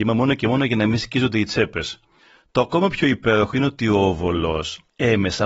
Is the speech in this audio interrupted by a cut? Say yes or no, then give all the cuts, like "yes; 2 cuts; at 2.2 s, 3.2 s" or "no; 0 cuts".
no; 0 cuts